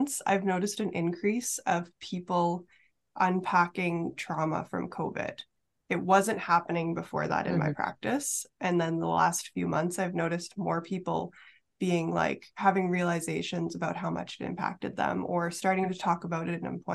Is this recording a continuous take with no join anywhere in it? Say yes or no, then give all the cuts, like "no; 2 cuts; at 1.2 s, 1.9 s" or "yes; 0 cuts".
yes; 0 cuts